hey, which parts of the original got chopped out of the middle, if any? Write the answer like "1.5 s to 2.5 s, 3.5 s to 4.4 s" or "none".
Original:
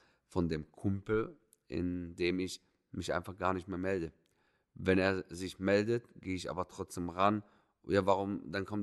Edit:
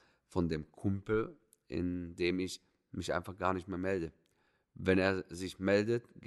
none